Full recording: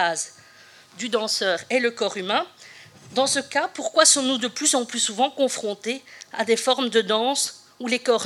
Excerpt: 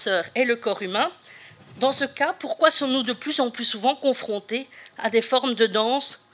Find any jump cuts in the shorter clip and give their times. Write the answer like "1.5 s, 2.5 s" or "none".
none